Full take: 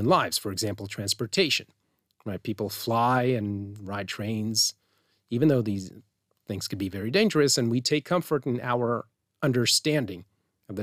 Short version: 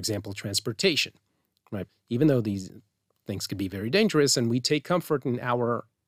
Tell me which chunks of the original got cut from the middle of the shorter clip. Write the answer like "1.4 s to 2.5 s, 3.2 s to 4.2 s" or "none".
2.4 s to 5.1 s